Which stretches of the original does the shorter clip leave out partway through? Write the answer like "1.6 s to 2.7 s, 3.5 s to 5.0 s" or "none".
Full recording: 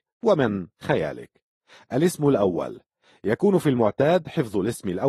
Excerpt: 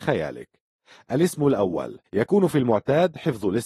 2.9 s to 3.2 s